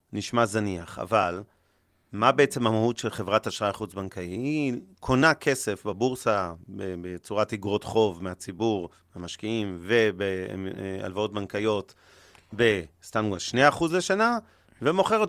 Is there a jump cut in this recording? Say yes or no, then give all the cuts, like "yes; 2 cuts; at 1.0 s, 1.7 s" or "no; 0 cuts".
no; 0 cuts